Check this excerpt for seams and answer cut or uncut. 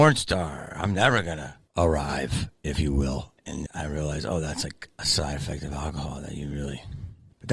cut